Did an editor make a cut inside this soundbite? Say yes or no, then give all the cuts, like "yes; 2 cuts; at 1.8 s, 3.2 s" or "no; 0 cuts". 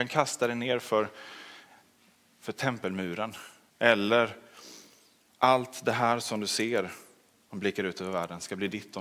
yes; 1 cut; at 3.7 s